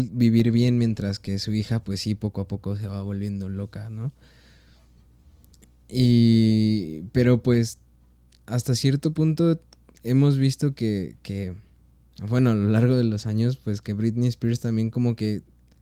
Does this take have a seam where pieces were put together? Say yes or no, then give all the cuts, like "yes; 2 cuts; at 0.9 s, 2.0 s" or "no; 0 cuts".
no; 0 cuts